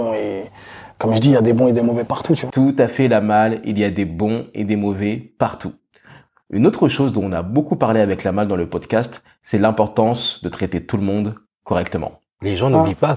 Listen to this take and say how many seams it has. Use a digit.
0